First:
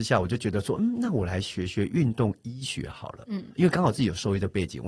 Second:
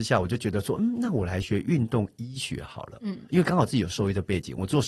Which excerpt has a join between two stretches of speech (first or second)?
second